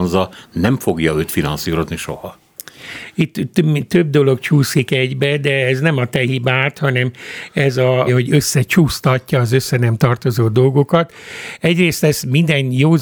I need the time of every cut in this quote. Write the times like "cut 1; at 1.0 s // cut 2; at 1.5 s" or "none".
cut 1; at 8.1 s

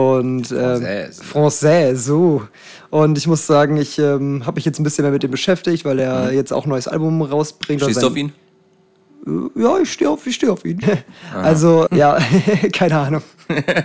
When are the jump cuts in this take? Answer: cut 1; at 10.8 s // cut 2; at 11.9 s

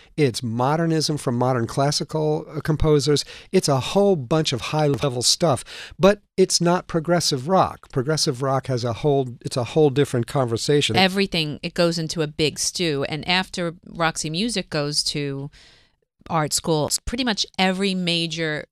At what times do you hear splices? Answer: cut 1; at 10.9 s

